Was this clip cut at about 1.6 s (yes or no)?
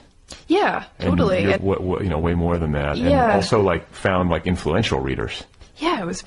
yes